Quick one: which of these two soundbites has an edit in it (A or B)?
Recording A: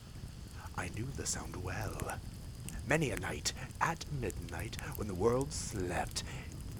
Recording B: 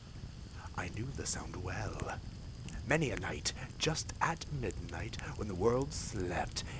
A